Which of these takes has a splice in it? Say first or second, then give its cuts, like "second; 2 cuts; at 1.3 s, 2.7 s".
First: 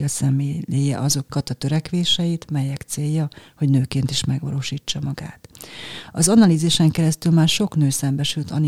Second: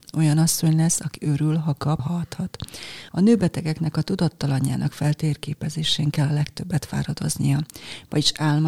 second; 2 cuts; at 2.0 s, 3.1 s